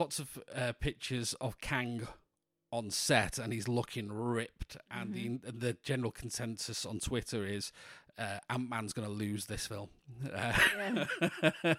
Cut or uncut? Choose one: uncut